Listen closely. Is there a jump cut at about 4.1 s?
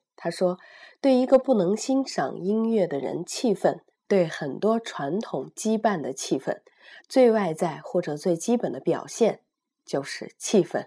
yes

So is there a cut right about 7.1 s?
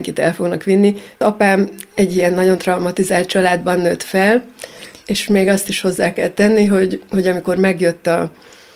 no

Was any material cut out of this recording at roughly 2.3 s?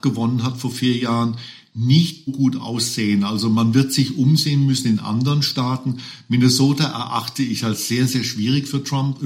yes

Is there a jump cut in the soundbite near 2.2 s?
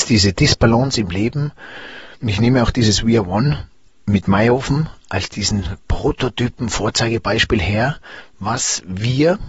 yes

